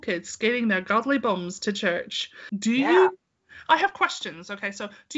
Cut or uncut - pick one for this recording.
cut